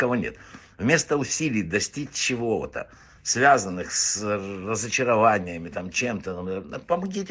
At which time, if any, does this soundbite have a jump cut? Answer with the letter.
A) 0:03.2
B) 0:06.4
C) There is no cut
C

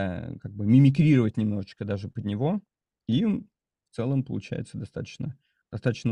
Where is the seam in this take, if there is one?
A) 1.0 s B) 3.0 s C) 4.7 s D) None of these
D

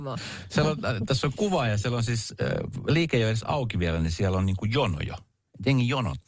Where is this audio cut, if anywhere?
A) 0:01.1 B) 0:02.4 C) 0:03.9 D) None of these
D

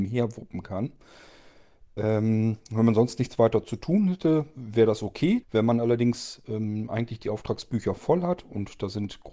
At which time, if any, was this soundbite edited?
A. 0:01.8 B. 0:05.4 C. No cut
B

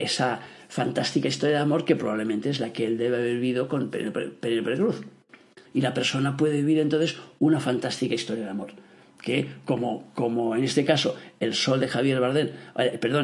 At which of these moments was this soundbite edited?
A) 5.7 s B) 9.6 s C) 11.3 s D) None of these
A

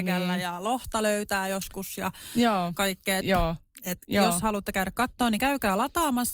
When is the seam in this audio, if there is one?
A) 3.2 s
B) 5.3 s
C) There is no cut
A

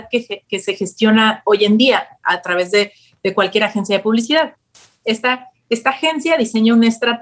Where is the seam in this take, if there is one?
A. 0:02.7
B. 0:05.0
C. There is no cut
B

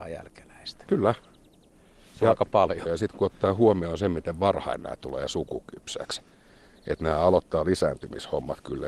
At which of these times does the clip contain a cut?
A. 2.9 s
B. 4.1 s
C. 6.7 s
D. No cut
A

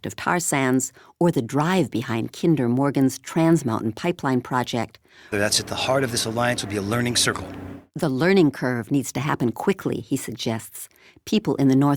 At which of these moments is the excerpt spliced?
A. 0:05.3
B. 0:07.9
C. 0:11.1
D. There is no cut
A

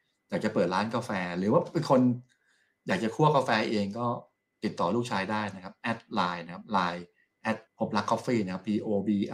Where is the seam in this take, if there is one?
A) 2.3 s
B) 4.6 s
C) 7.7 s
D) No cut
C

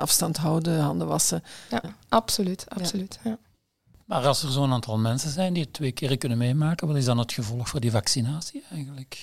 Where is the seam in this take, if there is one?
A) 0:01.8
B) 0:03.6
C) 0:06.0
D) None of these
A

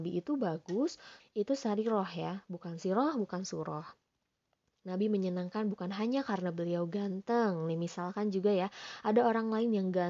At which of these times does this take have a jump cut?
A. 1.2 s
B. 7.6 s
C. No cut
A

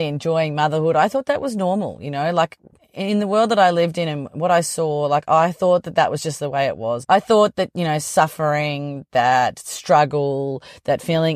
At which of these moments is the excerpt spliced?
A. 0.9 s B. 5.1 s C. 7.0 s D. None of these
C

